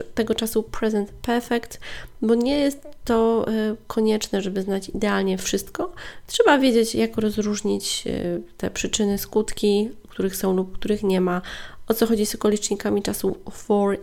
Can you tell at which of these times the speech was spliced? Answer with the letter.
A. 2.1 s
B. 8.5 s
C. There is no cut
C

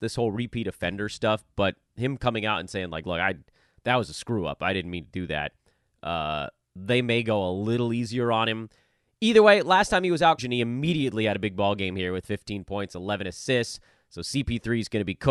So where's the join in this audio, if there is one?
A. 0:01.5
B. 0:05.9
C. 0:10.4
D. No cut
C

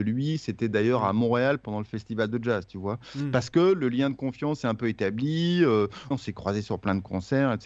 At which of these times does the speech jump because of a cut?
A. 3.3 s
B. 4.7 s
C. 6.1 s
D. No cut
C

